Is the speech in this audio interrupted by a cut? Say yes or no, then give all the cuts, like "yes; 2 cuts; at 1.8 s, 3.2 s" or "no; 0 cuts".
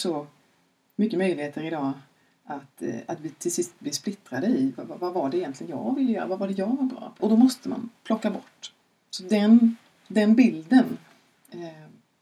yes; 1 cut; at 7.2 s